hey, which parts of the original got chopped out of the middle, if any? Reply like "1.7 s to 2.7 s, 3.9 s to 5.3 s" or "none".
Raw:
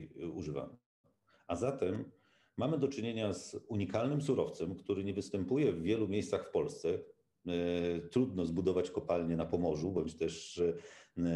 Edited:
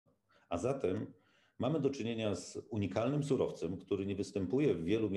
none

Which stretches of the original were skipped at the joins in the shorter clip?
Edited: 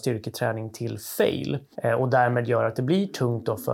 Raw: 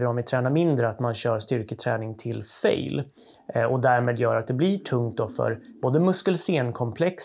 3.2 s to 3.4 s

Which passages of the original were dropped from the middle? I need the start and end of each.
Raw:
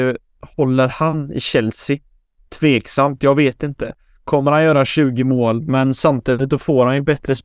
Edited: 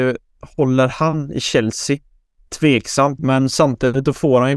3.2 s to 5.6 s

